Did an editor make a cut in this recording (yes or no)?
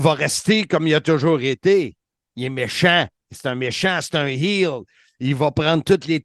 yes